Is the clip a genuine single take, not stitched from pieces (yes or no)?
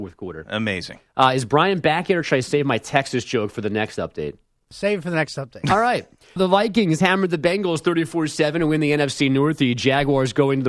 no